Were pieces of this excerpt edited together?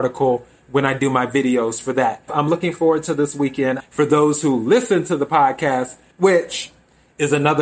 yes; 3 cuts; at 2.3 s, 3.8 s, 6.1 s

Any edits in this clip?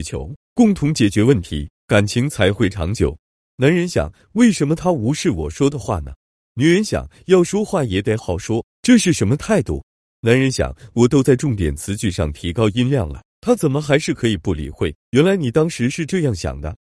yes; 2 cuts; at 8.2 s, 15.0 s

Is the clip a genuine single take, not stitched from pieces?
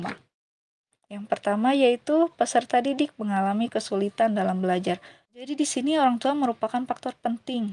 no; 2 cuts; at 0.9 s, 5.3 s

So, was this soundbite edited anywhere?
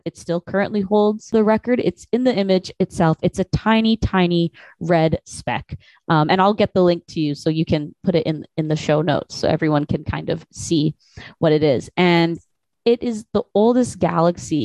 no; 0 cuts

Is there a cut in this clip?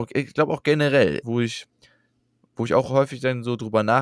yes; 1 cut; at 1.2 s

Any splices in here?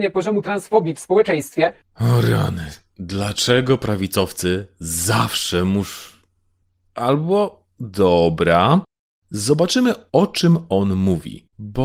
no; 0 cuts

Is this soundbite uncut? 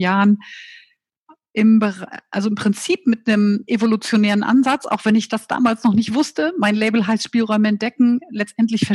yes; 0 cuts

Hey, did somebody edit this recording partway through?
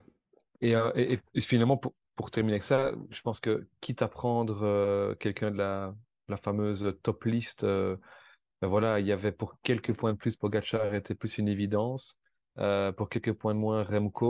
no; 0 cuts

